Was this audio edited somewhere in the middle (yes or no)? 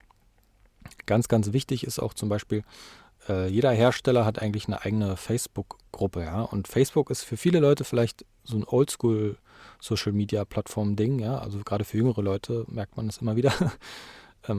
no